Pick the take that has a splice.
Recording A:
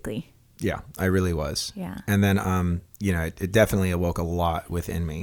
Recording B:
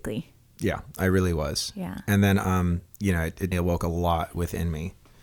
B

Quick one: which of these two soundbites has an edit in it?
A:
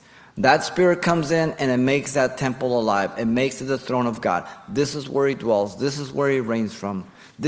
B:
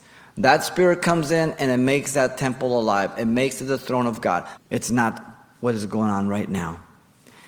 B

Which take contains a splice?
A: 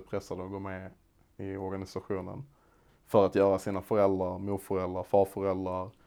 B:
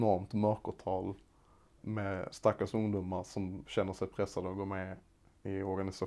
B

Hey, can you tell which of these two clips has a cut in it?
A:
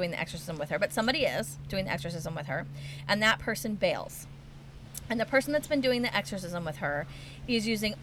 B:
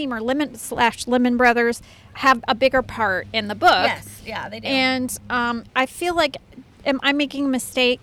B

